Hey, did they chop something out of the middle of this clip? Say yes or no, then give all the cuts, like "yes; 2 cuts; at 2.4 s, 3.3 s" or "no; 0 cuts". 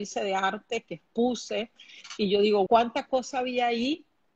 yes; 1 cut; at 2.7 s